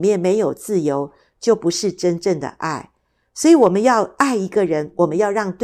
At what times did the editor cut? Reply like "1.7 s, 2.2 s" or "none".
none